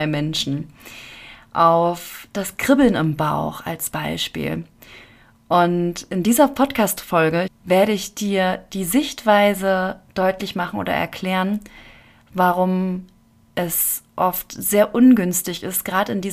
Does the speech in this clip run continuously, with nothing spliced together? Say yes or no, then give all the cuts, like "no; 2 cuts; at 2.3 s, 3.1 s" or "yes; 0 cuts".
no; 1 cut; at 7.5 s